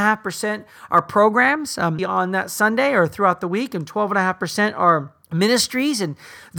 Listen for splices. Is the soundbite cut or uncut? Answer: cut